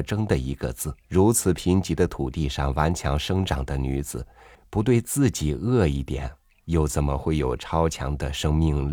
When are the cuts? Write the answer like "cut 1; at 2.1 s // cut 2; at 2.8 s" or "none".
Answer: cut 1; at 1.0 s

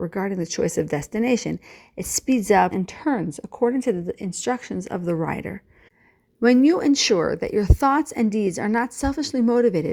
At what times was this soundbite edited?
cut 1; at 2.7 s

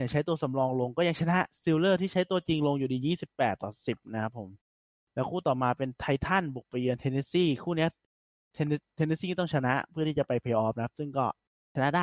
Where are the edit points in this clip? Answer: none

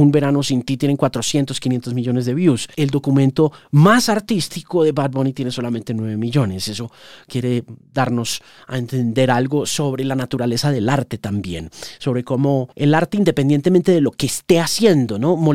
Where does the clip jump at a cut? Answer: none

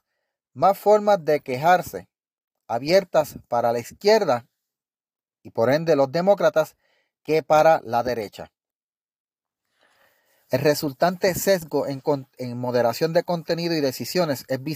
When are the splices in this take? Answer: none

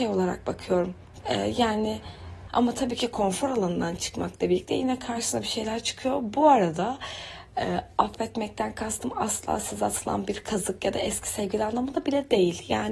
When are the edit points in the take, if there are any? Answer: cut 1; at 1.2 s // cut 2; at 2.5 s

